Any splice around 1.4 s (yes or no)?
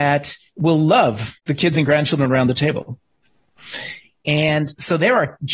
yes